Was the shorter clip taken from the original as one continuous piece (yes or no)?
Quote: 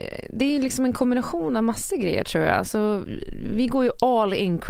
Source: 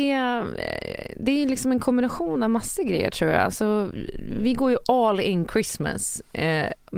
yes